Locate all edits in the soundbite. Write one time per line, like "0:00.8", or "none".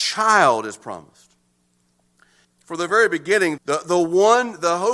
0:02.4
0:03.6